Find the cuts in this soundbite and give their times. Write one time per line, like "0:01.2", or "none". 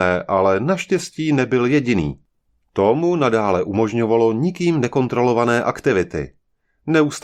0:02.6